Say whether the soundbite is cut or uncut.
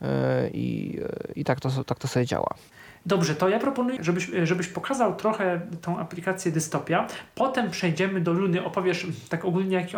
cut